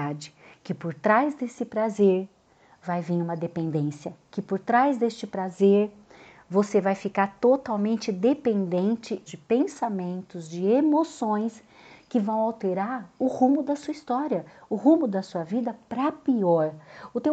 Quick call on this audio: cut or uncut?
cut